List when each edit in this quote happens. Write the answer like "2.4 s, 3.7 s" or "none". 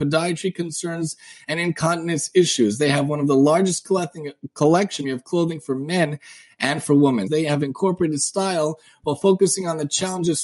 5.0 s, 7.3 s